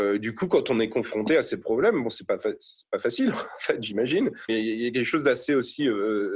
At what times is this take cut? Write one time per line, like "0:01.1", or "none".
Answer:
0:04.5

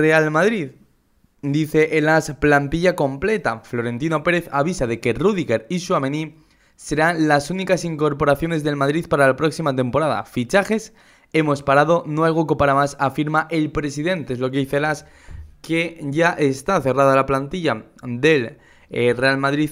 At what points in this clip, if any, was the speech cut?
none

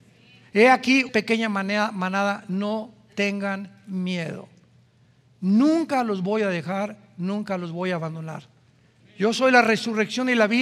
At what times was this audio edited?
0:01.1
0:09.0

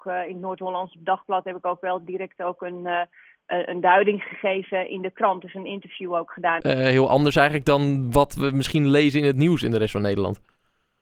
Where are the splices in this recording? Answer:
0:06.6

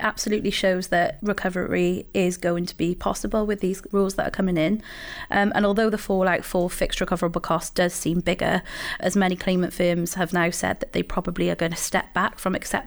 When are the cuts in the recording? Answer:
0:09.0

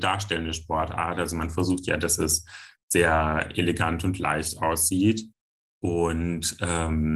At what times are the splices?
none

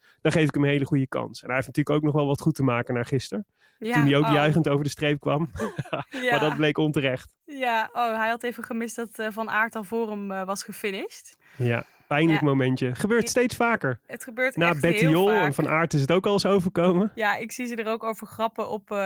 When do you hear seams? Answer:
none

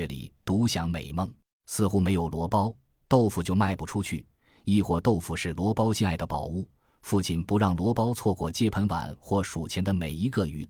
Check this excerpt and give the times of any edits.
0:01.5

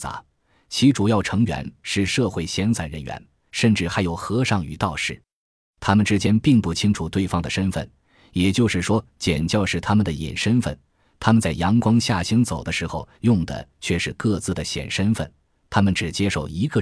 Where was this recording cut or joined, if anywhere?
0:03.5

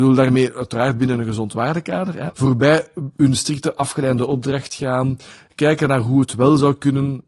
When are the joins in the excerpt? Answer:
0:02.3

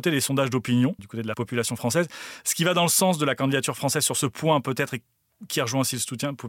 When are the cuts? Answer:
0:01.0

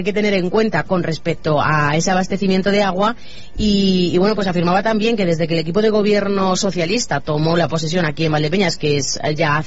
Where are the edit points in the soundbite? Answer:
none

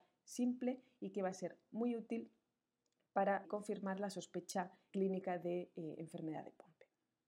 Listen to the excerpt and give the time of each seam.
0:03.4
0:04.9

